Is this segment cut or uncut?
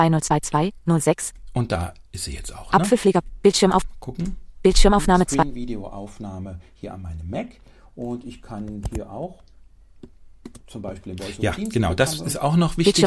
uncut